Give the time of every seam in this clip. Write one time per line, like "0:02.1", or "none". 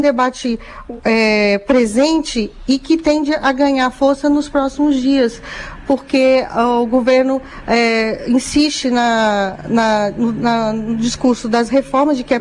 none